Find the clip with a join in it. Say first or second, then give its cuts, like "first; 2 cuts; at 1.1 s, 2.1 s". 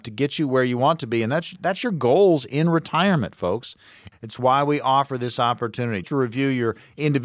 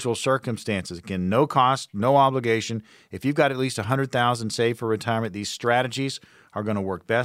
first; 2 cuts; at 4.1 s, 6.0 s